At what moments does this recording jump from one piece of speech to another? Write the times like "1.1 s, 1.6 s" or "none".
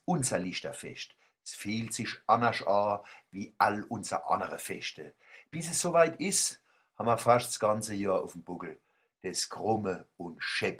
none